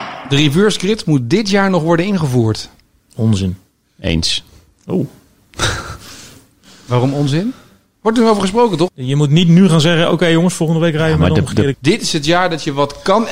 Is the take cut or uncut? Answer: cut